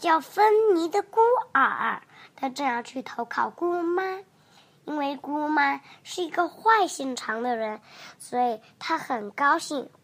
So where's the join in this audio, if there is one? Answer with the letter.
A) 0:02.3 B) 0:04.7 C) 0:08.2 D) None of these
D